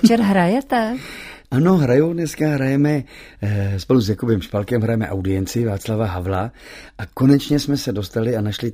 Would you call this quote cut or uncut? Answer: uncut